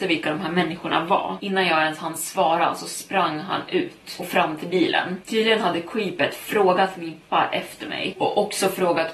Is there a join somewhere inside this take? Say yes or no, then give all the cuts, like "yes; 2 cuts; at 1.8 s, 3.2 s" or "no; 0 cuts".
yes; 1 cut; at 7.2 s